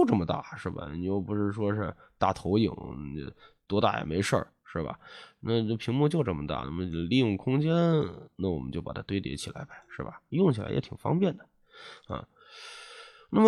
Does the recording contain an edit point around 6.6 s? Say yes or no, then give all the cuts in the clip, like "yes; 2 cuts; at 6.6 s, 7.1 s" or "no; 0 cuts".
no; 0 cuts